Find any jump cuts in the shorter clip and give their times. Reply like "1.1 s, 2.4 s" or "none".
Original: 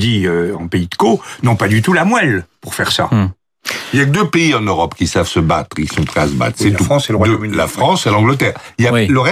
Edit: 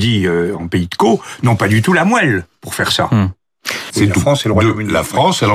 3.9 s